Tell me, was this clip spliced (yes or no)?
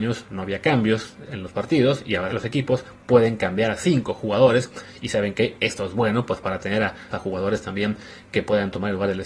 yes